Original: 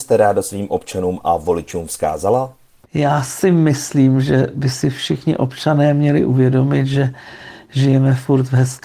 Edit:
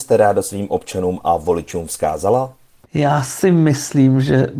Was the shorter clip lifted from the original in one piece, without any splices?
yes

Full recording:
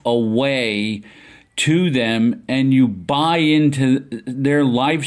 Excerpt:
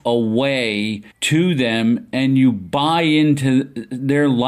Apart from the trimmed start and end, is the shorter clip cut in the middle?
yes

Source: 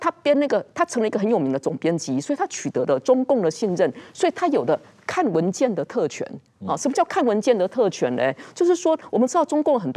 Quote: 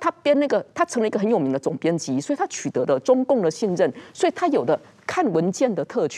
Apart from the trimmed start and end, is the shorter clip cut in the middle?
no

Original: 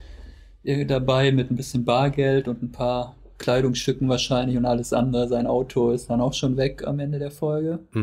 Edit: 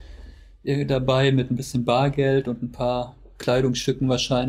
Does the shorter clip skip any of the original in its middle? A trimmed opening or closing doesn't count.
no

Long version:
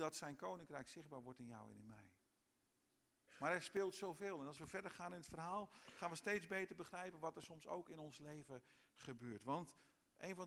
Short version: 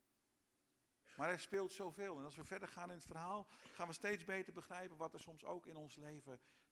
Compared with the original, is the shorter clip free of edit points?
yes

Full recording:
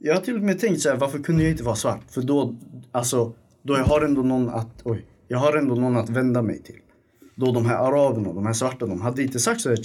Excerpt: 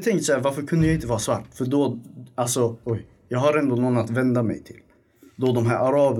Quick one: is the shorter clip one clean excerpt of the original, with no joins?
no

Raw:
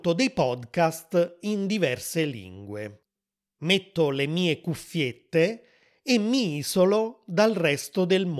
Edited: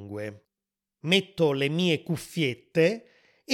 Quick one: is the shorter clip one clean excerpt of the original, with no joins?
yes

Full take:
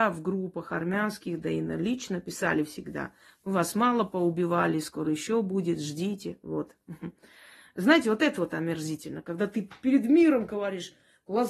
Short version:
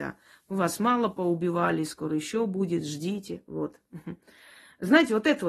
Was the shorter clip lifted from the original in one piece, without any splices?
yes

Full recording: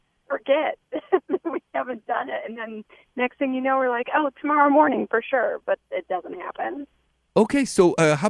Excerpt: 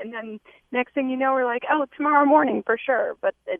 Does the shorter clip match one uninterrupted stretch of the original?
yes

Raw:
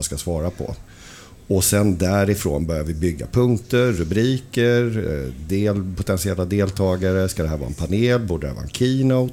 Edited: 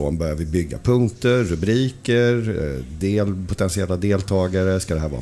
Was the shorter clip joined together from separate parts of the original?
no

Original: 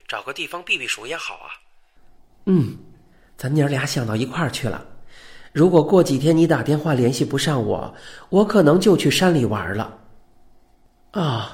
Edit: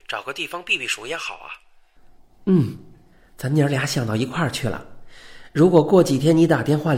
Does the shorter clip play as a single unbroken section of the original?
yes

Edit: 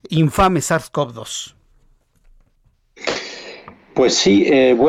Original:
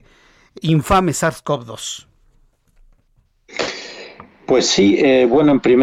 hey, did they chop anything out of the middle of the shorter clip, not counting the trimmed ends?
no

